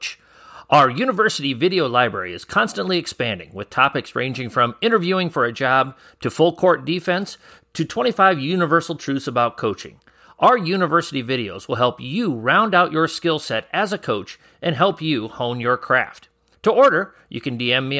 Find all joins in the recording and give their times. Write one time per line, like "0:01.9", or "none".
0:16.5